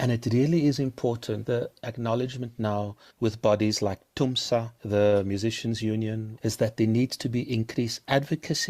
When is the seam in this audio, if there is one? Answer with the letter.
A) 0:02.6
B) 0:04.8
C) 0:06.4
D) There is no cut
C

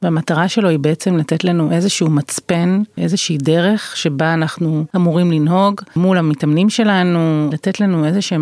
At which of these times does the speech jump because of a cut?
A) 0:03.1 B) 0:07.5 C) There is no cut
B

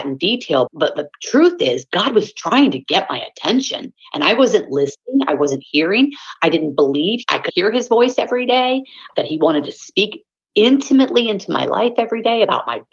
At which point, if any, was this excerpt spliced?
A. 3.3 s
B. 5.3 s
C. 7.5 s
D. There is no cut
C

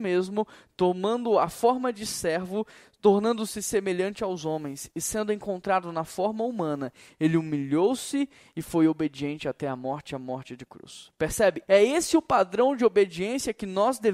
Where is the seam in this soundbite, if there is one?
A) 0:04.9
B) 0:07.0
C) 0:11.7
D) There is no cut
C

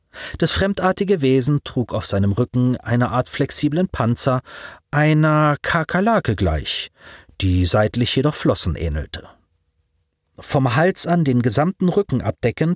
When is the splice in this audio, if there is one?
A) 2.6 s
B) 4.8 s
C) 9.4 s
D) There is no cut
D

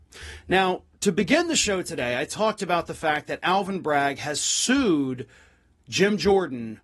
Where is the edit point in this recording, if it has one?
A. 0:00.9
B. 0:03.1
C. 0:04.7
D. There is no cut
D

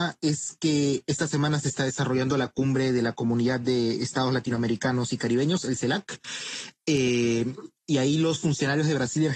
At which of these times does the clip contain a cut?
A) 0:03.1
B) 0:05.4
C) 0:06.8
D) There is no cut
D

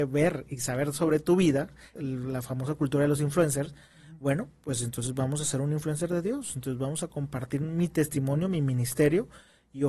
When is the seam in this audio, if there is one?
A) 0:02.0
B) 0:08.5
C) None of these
A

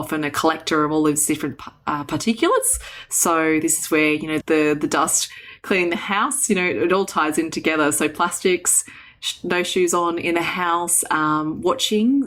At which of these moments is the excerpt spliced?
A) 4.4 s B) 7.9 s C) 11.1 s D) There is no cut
A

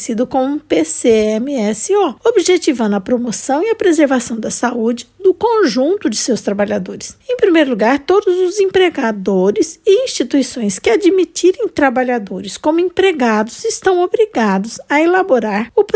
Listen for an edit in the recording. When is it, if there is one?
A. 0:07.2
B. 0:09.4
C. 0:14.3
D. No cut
A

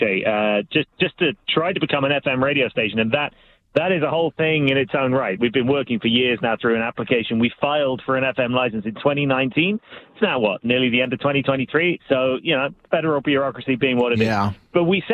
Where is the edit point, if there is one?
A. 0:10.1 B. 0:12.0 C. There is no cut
C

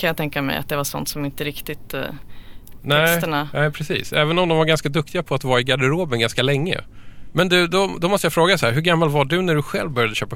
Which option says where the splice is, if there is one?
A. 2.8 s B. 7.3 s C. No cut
A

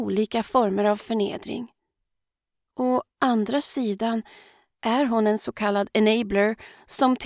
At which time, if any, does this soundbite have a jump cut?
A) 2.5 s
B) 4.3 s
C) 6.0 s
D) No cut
D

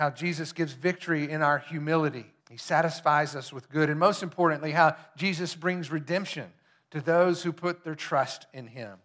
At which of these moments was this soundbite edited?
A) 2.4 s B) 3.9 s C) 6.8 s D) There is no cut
A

